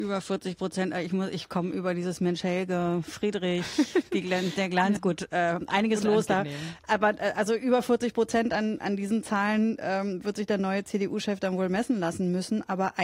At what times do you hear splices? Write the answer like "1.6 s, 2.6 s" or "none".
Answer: 5.0 s